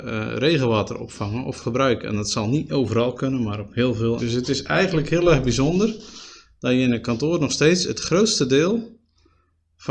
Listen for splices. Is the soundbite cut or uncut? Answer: cut